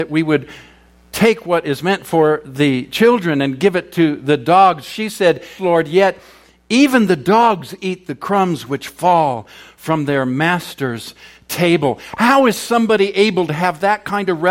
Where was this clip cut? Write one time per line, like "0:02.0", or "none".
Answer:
0:05.6